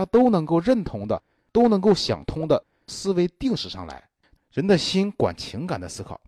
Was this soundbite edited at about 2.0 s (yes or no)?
no